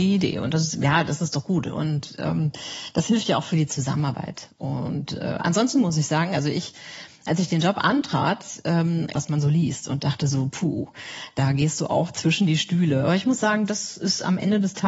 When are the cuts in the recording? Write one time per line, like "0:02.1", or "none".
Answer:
0:09.1